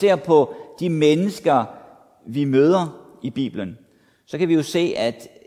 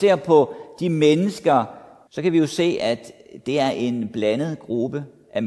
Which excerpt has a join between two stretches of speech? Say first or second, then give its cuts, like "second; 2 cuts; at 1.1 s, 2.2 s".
second; 1 cut; at 2.1 s